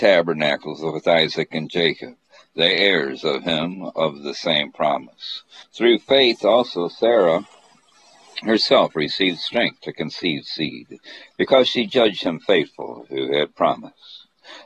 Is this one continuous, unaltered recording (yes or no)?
no